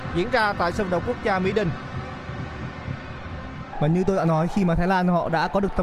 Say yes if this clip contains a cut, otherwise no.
yes